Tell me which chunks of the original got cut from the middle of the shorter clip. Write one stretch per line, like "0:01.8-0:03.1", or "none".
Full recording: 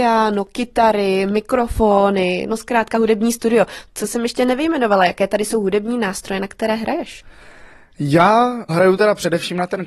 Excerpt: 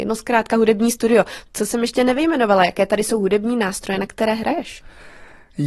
none